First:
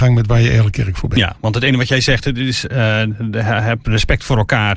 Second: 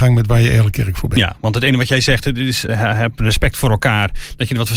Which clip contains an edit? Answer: second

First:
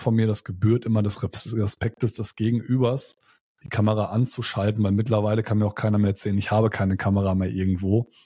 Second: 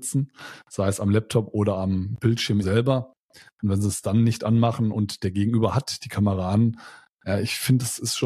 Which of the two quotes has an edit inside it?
second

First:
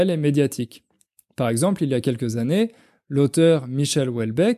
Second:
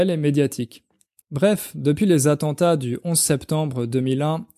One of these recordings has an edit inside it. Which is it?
second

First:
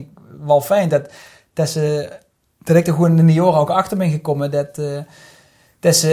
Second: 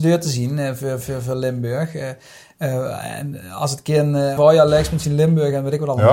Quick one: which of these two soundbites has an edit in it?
second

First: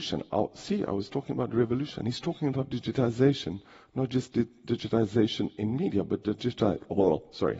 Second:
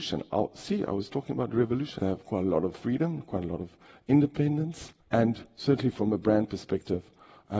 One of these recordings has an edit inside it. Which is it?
second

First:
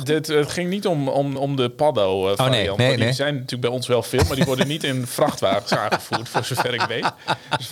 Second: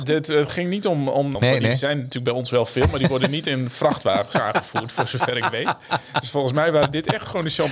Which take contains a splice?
second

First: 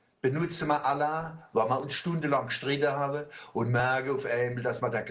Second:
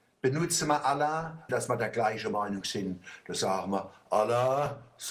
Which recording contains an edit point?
second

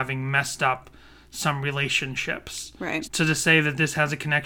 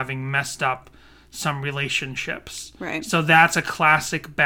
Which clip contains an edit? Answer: first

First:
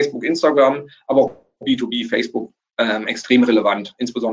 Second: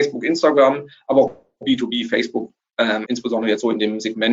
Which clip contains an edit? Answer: second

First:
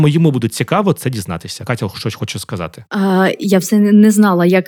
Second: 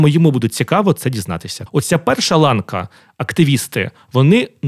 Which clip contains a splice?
second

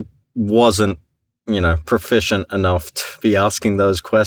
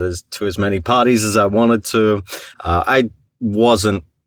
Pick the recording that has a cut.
second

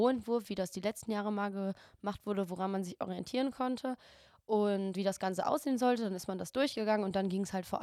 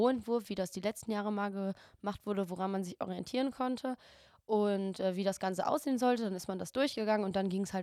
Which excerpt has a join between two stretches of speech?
first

